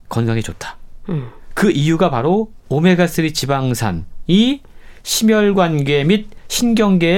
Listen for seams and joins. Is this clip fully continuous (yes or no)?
yes